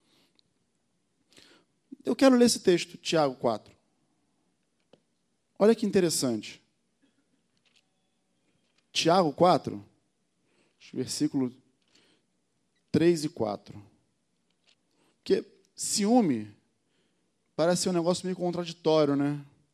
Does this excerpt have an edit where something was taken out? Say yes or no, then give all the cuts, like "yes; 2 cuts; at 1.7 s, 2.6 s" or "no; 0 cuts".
no; 0 cuts